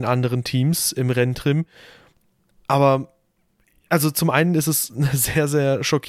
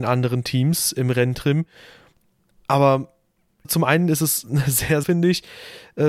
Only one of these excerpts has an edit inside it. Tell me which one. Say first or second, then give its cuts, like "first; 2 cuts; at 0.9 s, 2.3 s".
second; 2 cuts; at 3.6 s, 5.0 s